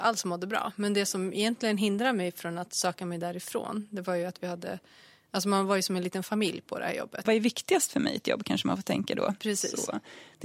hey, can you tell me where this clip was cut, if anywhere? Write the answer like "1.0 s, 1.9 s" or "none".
7.3 s, 9.4 s